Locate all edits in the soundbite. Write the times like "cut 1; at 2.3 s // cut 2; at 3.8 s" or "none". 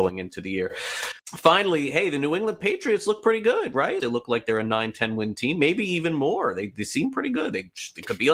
cut 1; at 1.2 s // cut 2; at 4.0 s